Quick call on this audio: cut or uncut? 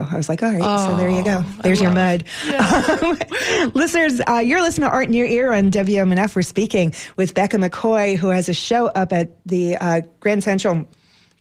uncut